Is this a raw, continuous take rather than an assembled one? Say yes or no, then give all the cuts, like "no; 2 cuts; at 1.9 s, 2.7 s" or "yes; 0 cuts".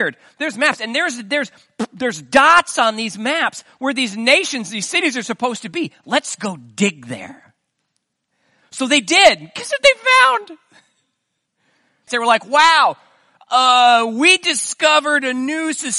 no; 1 cut; at 12.1 s